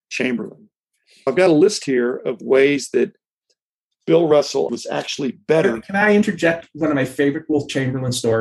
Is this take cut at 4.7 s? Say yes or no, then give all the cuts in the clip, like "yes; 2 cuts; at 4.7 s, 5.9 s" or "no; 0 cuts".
yes; 1 cut; at 4.7 s